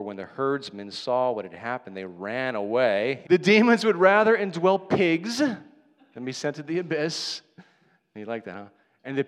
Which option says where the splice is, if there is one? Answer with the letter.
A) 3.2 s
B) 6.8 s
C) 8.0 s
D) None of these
A